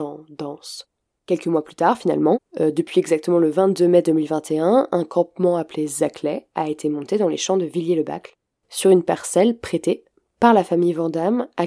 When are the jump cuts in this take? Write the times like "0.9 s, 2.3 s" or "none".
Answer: 1.2 s